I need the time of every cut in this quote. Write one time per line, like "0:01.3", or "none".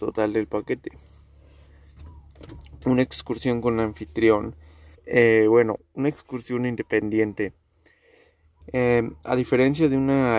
0:04.9
0:08.6